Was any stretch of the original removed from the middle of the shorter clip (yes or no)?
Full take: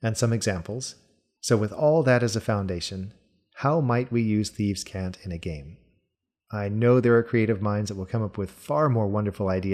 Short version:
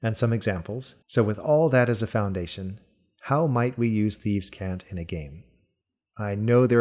yes